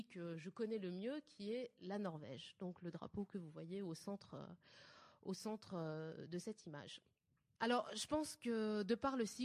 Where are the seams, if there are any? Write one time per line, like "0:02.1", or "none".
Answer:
0:07.6

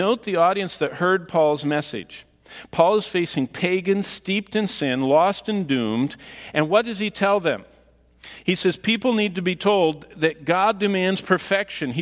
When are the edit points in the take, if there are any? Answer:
none

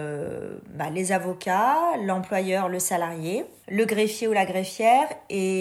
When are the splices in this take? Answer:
none

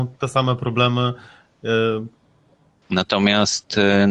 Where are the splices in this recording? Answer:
0:02.8

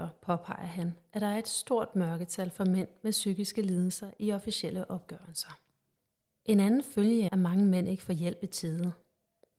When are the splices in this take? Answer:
0:07.3

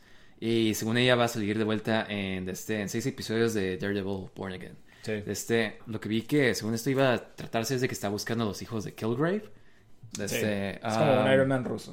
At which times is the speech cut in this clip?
0:05.8
0:10.1

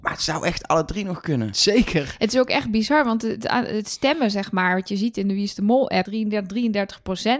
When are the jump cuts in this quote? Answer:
0:06.1

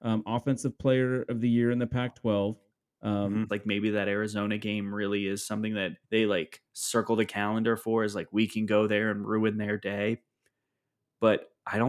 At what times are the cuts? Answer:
0:03.5
0:06.0

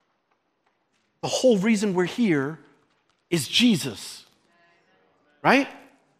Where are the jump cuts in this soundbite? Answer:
none

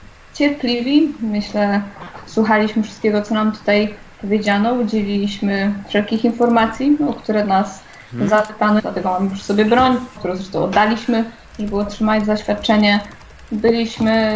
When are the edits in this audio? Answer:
0:08.8
0:10.2

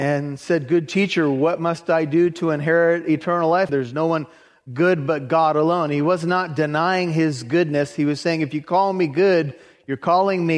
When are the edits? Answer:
0:03.7

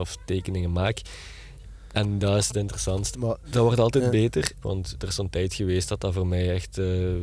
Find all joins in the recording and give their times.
0:03.1
0:04.6

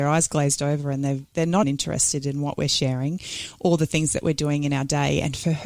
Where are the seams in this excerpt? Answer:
0:01.6

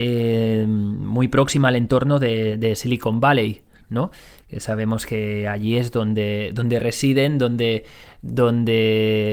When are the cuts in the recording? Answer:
none

